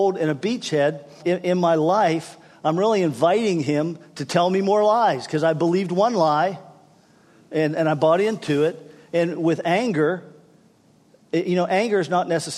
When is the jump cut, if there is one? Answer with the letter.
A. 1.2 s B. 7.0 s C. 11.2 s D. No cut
A